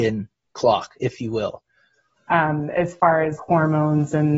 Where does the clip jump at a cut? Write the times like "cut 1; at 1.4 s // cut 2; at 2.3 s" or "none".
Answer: cut 1; at 2.2 s // cut 2; at 3.4 s

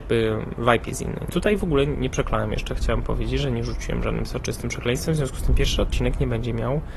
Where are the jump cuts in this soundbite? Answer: cut 1; at 1.3 s

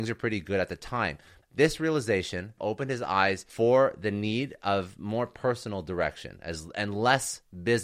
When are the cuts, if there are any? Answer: cut 1; at 1.4 s // cut 2; at 2.6 s

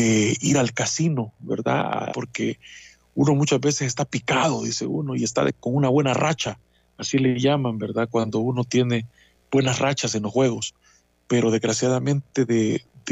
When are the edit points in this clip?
cut 1; at 2.1 s

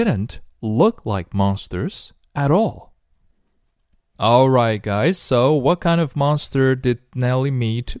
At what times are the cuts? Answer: none

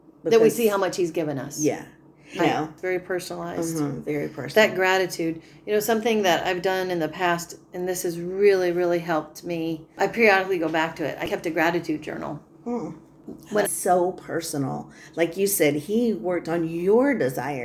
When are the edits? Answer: cut 1; at 2.4 s // cut 2; at 13.6 s

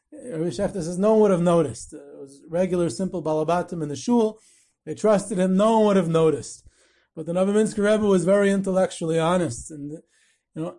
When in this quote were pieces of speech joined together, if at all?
none

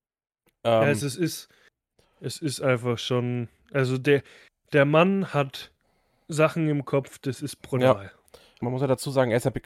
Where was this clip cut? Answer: cut 1; at 8.6 s

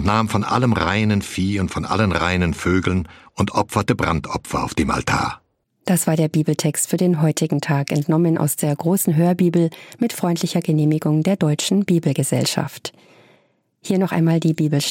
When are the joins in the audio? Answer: cut 1; at 5.6 s

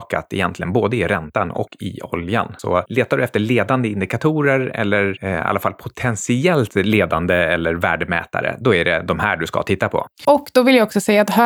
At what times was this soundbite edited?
none

